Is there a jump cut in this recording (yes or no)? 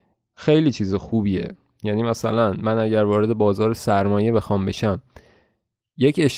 no